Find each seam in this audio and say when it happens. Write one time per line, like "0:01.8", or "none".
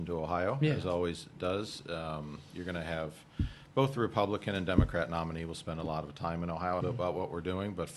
0:06.8